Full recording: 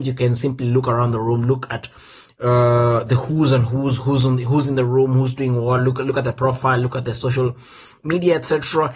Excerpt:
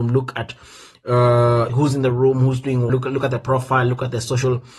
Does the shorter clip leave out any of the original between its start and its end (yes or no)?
yes